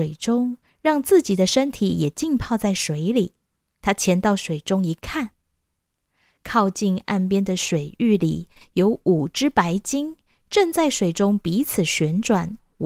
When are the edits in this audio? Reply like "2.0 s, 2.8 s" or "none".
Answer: 3.8 s